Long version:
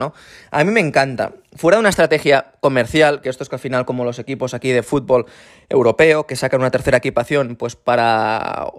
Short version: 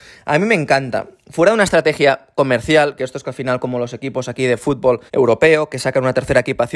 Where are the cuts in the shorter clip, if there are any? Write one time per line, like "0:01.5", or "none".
0:05.1